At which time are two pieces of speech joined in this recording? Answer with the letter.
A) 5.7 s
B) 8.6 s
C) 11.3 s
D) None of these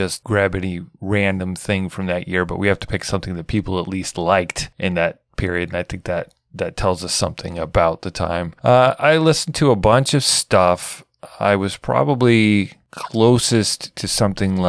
B